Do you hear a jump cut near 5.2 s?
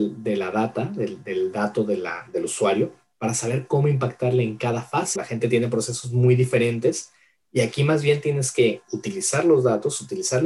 yes; 1 cut; at 5.2 s

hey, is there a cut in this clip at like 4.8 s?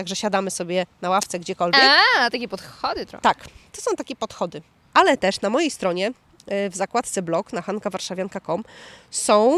yes; 1 cut; at 4.8 s

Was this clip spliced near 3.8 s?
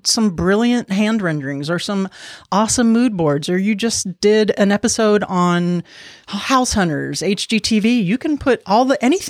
no; 0 cuts

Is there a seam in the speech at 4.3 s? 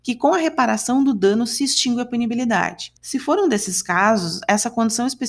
no; 1 cut; at 3.0 s

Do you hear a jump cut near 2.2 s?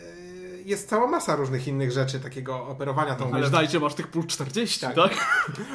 yes; 2 cuts; at 2.2 s, 3.3 s

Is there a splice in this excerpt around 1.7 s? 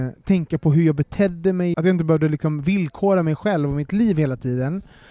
yes; 1 cut; at 1.7 s

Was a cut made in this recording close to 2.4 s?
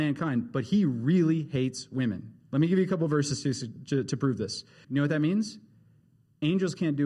no; 1 cut; at 4.8 s

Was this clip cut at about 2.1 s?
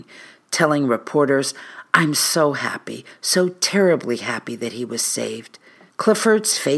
no; 1 cut; at 5.9 s

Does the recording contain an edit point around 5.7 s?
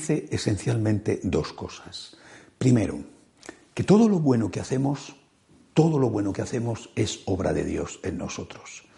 no; 0 cuts

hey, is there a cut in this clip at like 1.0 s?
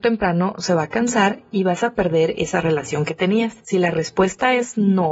no; 1 cut; at 3.6 s

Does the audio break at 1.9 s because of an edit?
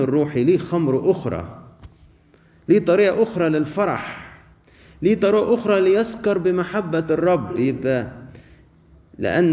no; 0 cuts

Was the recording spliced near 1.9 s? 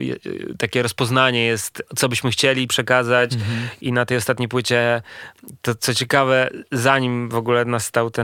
yes; 1 cut; at 1.9 s

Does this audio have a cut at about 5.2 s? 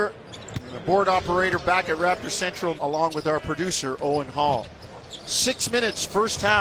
no; 1 cut; at 2.8 s

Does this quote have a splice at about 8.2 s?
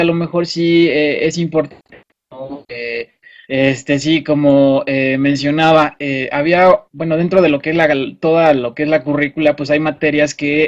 no; 2 cuts; at 3.4 s, 6.9 s

